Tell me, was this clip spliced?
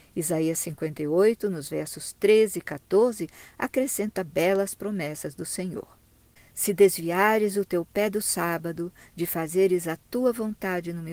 no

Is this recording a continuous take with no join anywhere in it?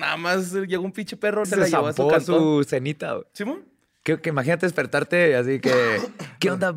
no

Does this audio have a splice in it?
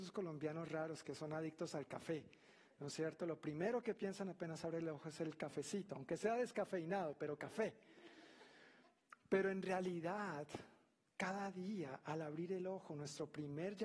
no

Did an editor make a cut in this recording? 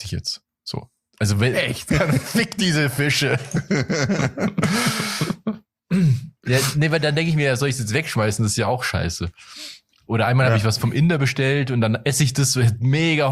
yes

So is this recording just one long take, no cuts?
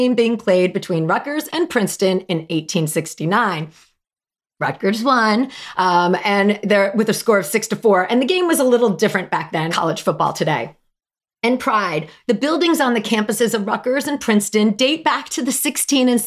no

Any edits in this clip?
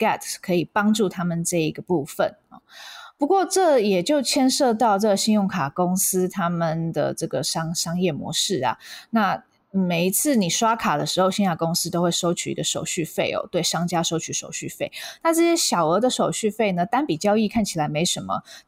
no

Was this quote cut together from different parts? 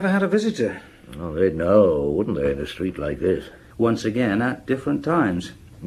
yes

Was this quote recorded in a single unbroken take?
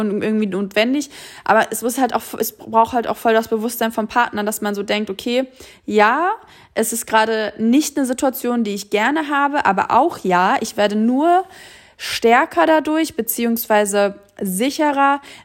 yes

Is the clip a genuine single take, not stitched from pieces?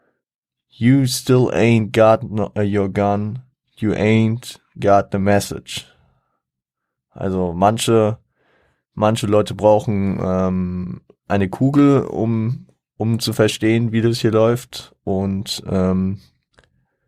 yes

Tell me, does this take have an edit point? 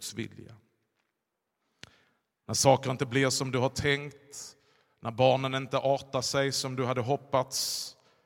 no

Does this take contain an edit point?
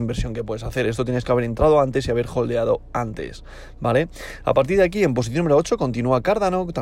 no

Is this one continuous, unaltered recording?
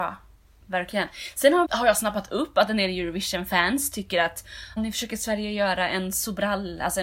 no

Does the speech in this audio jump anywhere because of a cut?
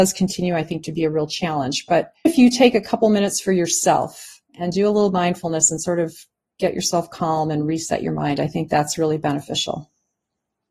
yes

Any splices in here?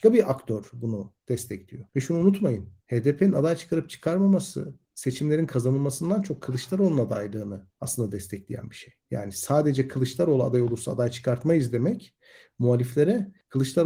yes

